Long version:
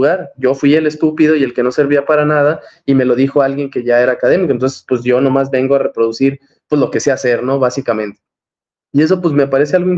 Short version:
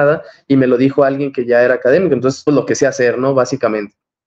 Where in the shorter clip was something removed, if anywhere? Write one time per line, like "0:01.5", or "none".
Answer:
0:02.5

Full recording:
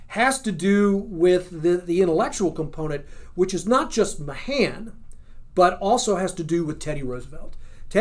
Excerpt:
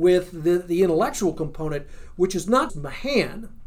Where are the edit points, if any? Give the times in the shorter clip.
0:02.7

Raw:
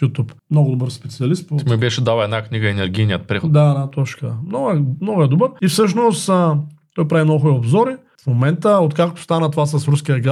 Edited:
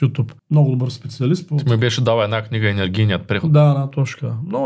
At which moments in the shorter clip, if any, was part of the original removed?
none

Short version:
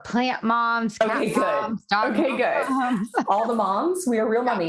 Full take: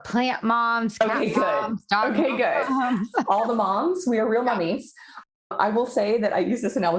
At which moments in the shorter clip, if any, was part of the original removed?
none

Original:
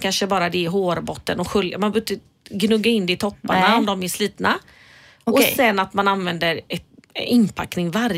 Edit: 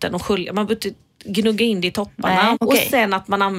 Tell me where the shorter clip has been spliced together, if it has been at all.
0:02.5

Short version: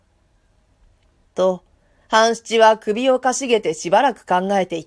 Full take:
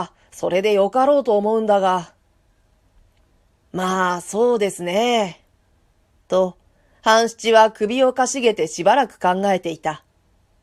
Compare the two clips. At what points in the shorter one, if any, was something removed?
0:01.3

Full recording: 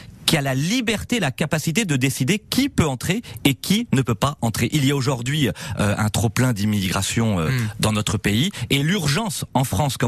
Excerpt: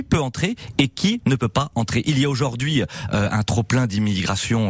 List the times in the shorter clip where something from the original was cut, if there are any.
none

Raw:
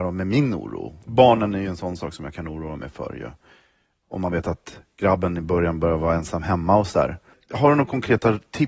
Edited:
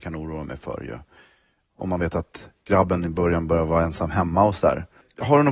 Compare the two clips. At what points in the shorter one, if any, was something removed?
none

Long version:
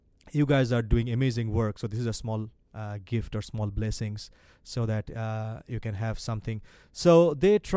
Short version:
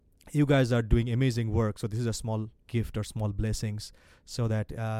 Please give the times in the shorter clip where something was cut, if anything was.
0:02.7

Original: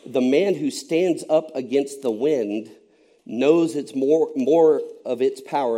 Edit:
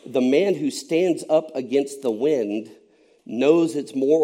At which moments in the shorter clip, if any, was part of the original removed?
none

